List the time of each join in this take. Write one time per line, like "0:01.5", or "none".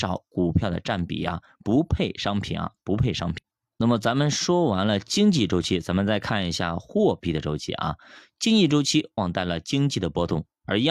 0:09.2